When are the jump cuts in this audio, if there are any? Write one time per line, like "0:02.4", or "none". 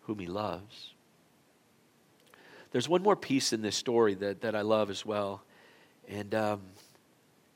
none